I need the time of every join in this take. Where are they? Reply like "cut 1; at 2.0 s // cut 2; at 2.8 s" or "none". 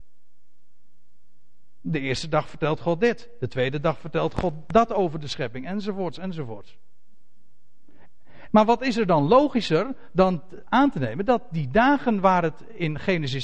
cut 1; at 8.5 s

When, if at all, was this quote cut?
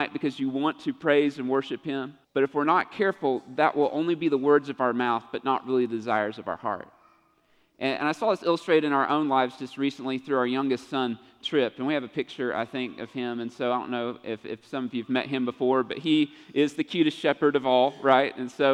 cut 1; at 2.2 s

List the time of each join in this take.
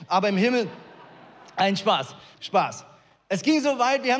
cut 1; at 2.3 s

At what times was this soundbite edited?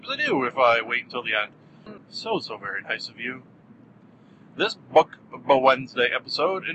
cut 1; at 2.0 s

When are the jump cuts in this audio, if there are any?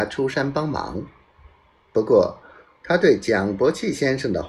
none

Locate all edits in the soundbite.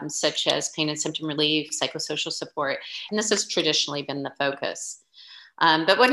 cut 1; at 3.1 s

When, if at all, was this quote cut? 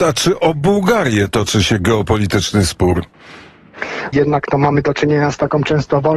cut 1; at 4.1 s

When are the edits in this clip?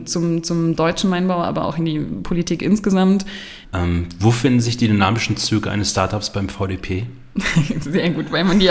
cut 1; at 3.6 s

